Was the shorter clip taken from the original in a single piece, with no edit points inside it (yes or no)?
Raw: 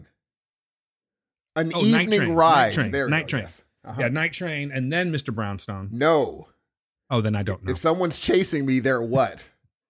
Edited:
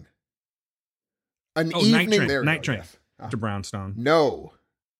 no